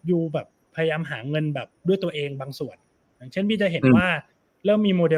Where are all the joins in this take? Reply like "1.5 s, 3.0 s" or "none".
none